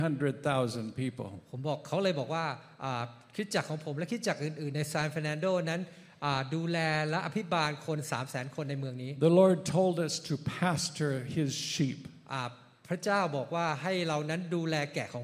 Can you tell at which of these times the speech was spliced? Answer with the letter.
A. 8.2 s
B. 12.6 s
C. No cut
C